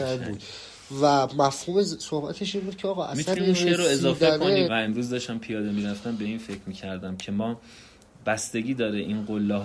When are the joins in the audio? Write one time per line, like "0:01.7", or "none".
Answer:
0:04.6